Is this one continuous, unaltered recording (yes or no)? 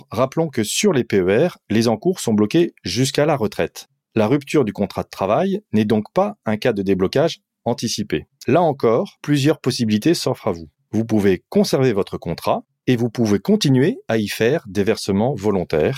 no